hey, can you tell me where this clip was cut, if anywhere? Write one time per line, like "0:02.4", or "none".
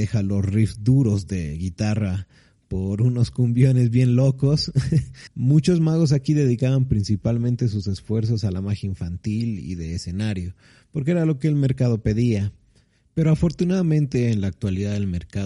0:05.3